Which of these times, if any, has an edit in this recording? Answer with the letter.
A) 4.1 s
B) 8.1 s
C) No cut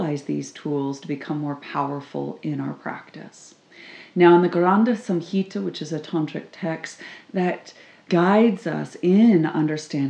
B